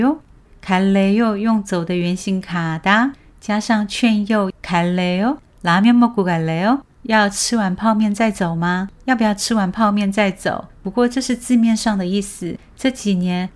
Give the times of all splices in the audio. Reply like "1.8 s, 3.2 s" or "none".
none